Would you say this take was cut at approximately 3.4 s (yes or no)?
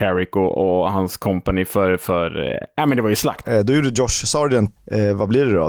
yes